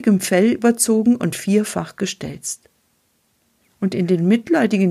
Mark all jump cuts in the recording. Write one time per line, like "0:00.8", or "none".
0:03.6